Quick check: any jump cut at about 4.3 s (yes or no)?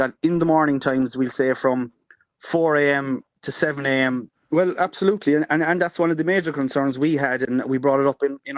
yes